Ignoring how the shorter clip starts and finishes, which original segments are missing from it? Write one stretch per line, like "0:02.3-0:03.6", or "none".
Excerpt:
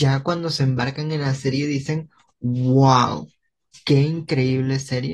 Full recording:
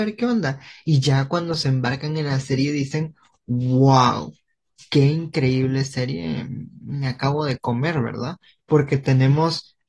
none